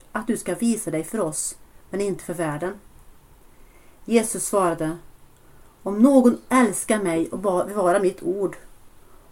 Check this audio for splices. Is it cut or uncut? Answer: uncut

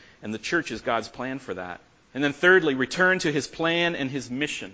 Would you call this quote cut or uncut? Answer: cut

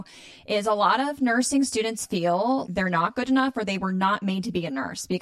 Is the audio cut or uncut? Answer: cut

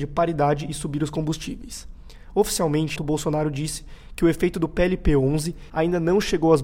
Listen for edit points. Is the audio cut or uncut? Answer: cut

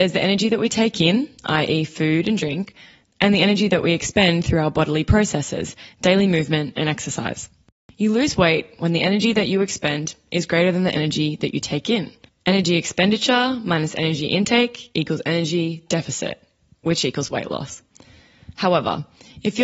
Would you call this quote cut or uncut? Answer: uncut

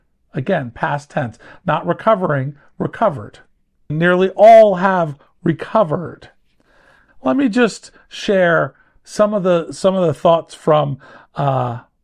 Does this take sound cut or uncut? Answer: cut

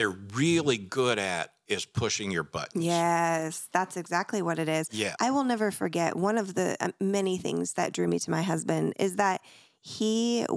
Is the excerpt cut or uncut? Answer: cut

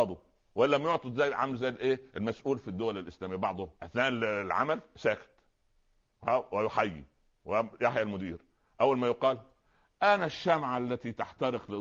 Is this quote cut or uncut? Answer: cut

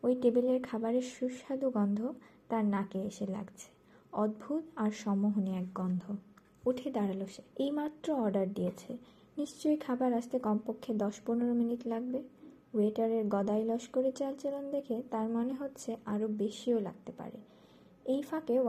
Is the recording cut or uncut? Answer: cut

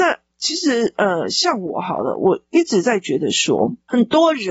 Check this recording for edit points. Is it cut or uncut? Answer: uncut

